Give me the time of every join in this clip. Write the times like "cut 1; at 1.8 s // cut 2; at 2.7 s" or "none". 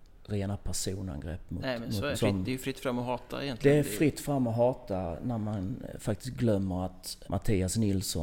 cut 1; at 2.1 s // cut 2; at 7.2 s